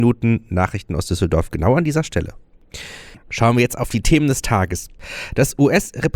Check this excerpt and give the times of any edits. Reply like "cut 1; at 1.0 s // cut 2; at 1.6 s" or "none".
cut 1; at 3.2 s